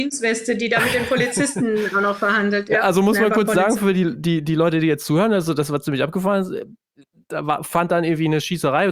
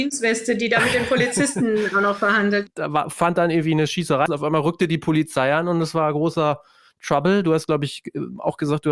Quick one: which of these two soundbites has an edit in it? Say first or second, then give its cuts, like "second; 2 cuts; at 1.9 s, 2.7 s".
second; 2 cuts; at 2.7 s, 4.3 s